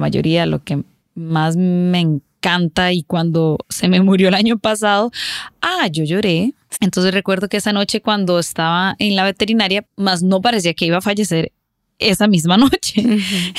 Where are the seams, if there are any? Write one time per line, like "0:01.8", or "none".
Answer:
0:06.7
0:09.8

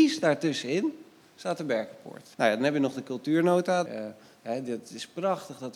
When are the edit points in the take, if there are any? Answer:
0:02.3
0:03.9

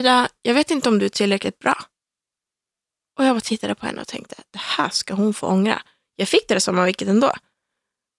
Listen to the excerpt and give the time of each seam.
none

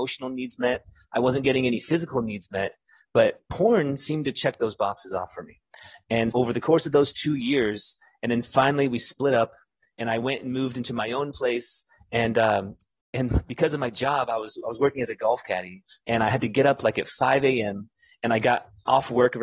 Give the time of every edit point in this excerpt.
0:06.3

